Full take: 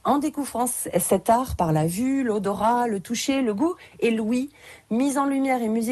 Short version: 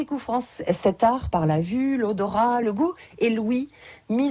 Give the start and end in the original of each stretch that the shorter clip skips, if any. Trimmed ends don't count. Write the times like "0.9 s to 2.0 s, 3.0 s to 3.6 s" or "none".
2.9 s to 3.4 s